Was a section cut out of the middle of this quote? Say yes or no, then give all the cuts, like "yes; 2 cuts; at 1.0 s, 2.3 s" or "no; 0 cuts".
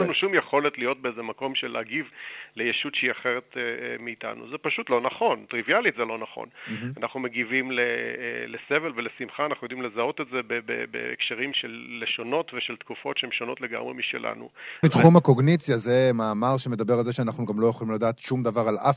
yes; 2 cuts; at 11.5 s, 14.8 s